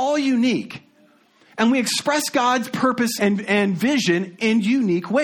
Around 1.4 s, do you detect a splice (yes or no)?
no